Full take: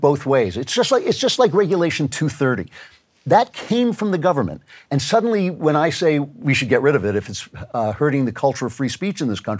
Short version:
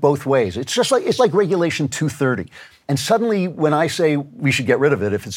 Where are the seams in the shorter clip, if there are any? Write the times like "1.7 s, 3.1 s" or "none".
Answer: 1.2 s, 2.8 s